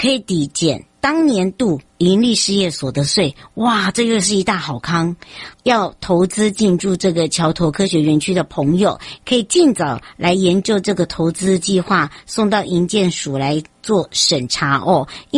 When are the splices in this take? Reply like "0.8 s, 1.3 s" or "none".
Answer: 5.5 s, 9.2 s